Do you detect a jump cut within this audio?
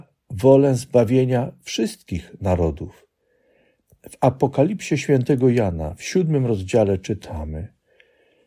no; 0 cuts

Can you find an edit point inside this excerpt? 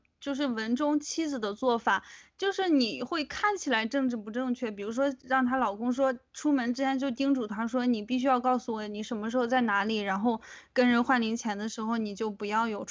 no; 0 cuts

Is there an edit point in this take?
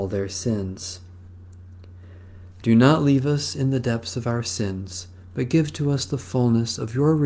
yes; 1 cut; at 2.6 s

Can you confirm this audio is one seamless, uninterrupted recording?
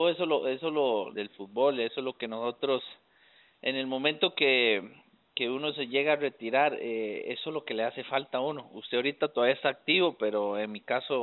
no; 1 cut; at 1.1 s

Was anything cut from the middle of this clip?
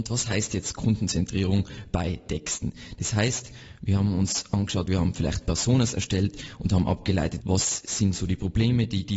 yes; 2 cuts; at 4.9 s, 7.4 s

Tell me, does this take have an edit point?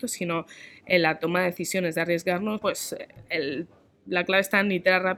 yes; 1 cut; at 2.6 s

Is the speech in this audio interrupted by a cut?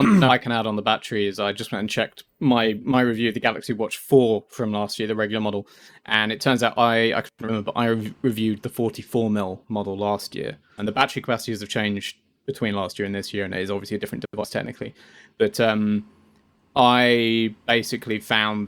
yes; 1 cut; at 10.8 s

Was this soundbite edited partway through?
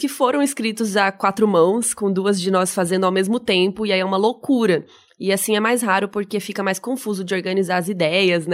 no; 0 cuts

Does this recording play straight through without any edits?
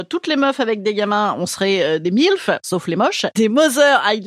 yes; 0 cuts

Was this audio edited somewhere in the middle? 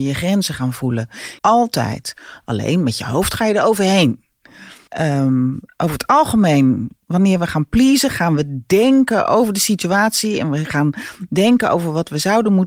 yes; 2 cuts; at 1.4 s, 4.9 s

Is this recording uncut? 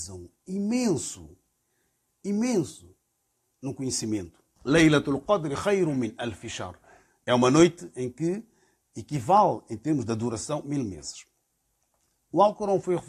no; 1 cut; at 4.6 s

